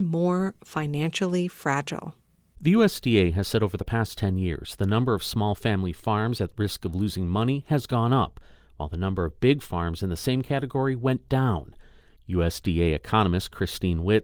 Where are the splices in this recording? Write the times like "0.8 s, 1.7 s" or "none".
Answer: none